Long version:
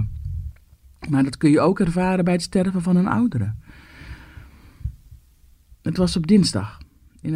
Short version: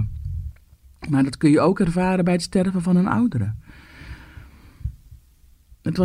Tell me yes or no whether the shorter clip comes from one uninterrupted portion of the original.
yes